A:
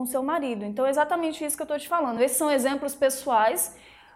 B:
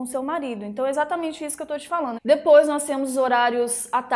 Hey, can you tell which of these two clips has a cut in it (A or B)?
B